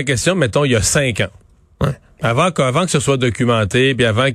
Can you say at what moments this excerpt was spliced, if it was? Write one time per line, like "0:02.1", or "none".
none